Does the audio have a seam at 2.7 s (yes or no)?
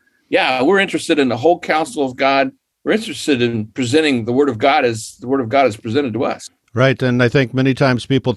yes